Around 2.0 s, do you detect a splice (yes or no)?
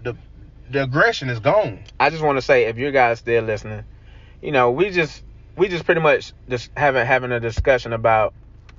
yes